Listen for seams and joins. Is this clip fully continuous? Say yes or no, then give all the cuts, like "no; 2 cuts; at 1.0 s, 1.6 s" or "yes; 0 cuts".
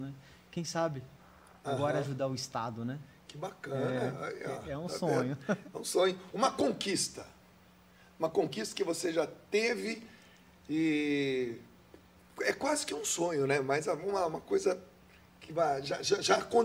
yes; 0 cuts